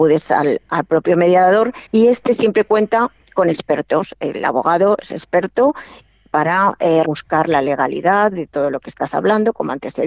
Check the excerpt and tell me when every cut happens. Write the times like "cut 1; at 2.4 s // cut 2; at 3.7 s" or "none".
cut 1; at 1.9 s // cut 2; at 7.0 s